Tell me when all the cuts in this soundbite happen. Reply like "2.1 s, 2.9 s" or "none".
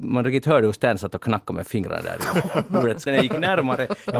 3.1 s